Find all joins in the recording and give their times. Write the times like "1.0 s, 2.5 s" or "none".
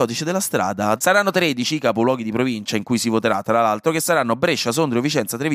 1.0 s